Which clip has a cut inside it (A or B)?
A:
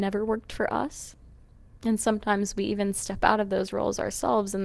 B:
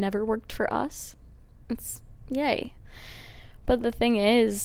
B